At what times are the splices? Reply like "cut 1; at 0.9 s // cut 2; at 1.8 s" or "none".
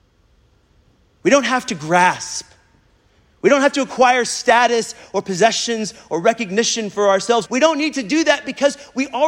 cut 1; at 7.4 s